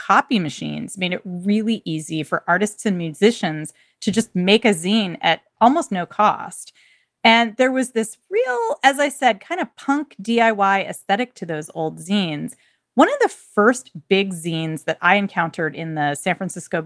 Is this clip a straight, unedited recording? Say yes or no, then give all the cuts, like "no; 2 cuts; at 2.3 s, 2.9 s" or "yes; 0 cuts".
yes; 0 cuts